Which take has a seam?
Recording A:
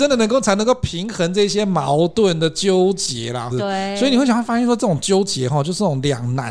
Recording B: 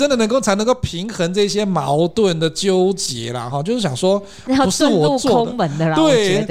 A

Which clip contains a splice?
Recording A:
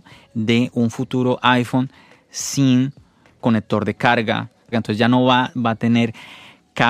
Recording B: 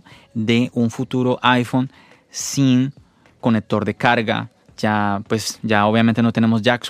A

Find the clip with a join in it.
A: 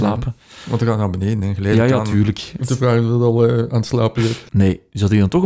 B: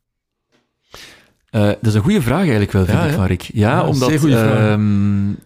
A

